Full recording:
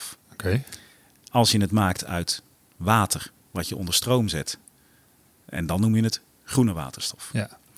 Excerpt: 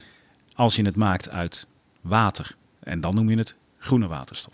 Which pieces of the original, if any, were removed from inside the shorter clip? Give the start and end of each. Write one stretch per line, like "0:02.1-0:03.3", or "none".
0:03.4-0:05.3

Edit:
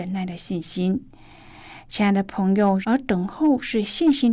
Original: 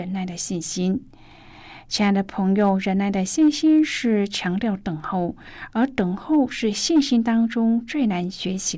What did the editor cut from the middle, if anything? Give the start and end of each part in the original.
0:02.8-0:05.7

